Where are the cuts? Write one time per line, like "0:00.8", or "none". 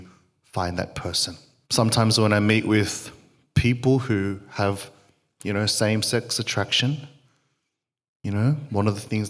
0:01.6